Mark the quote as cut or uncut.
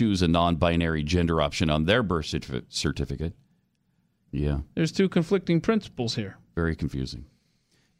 cut